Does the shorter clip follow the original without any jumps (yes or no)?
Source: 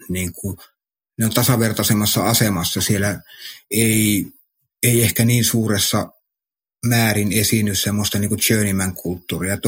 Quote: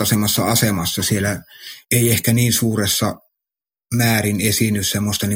no